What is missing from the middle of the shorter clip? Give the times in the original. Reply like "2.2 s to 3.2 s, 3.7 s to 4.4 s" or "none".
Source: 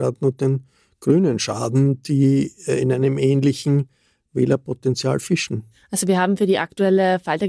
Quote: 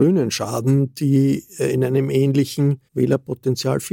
4.0 s to 4.3 s